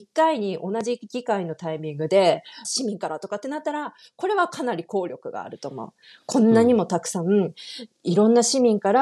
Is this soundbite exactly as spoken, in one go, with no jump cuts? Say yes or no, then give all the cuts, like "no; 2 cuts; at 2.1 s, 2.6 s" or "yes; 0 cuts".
no; 1 cut; at 2.6 s